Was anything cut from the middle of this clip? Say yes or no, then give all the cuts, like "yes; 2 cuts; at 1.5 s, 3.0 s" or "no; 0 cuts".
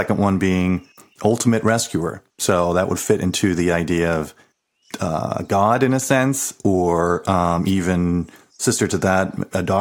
no; 0 cuts